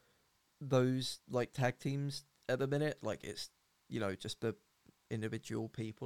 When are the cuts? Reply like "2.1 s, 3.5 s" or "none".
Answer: none